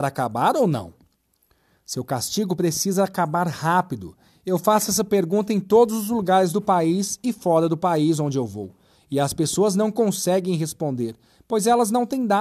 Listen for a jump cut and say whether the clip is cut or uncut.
uncut